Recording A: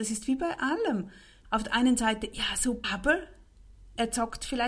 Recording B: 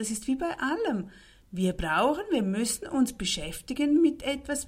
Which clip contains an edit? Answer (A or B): A